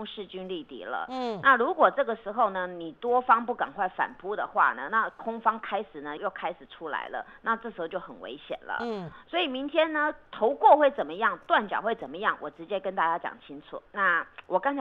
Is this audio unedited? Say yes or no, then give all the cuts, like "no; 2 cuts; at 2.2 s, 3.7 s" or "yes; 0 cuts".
no; 2 cuts; at 6.2 s, 13.9 s